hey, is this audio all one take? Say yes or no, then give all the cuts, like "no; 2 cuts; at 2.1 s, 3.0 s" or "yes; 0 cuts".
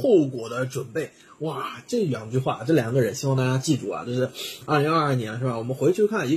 yes; 0 cuts